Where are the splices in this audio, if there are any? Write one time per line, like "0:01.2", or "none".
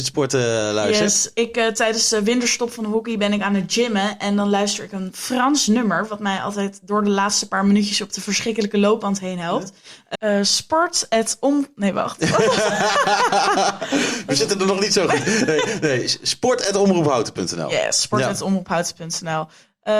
0:10.1